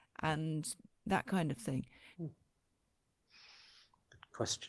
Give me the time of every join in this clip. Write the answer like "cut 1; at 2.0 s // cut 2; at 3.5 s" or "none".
cut 1; at 2.1 s